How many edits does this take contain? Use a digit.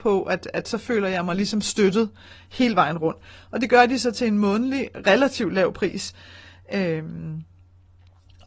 0